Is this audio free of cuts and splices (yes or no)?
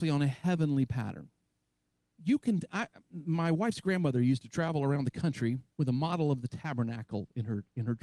no